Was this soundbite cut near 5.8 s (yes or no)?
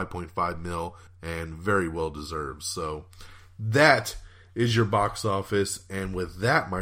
no